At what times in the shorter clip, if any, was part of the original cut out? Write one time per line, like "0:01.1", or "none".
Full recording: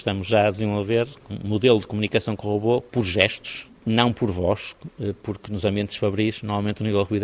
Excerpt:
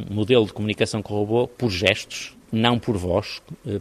none